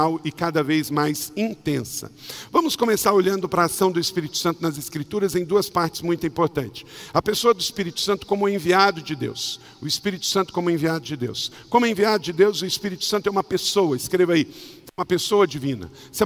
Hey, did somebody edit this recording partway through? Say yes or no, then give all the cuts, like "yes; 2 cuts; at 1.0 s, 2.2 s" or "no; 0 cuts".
no; 0 cuts